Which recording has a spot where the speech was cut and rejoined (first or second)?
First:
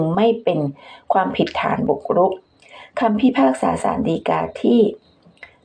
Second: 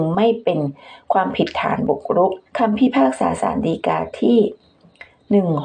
second